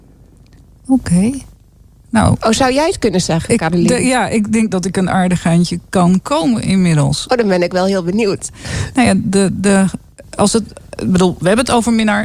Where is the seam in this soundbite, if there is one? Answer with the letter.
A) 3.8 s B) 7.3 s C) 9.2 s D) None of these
D